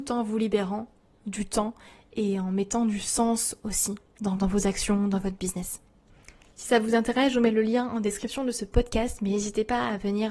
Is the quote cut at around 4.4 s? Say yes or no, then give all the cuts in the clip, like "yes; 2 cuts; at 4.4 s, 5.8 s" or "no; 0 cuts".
yes; 1 cut; at 4.4 s